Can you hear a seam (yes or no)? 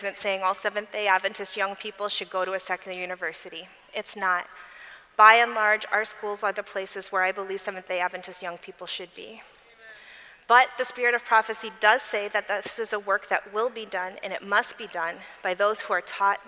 no